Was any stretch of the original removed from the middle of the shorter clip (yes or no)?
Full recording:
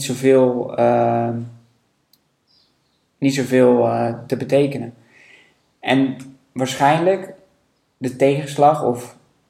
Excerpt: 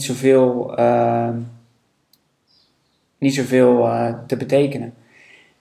no